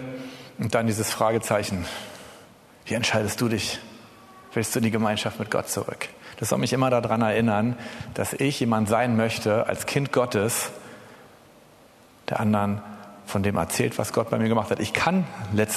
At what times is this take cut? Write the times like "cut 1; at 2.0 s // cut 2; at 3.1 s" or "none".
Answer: none